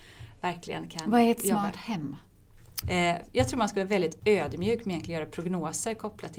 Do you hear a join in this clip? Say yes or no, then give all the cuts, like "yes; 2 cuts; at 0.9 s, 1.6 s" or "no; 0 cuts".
yes; 1 cut; at 2.8 s